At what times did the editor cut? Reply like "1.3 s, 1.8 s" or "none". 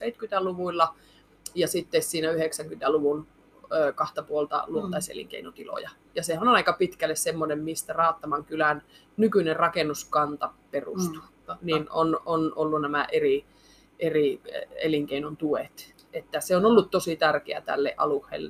none